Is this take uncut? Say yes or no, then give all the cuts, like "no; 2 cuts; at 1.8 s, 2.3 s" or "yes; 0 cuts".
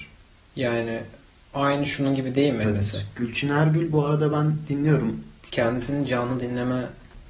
no; 2 cuts; at 2.6 s, 5.5 s